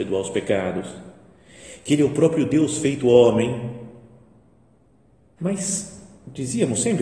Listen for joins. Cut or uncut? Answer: cut